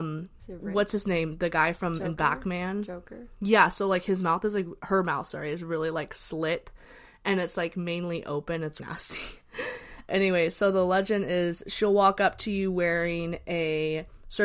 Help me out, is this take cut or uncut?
cut